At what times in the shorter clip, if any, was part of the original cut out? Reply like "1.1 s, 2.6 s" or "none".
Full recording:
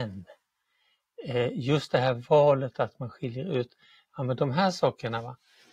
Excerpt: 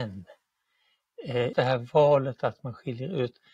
1.5 s